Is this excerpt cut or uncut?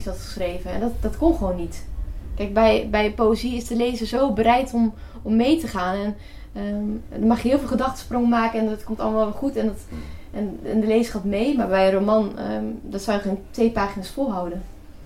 uncut